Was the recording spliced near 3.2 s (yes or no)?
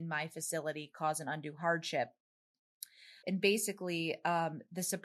yes